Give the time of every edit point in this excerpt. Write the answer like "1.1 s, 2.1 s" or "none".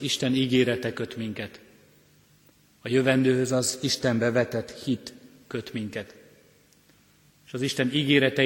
none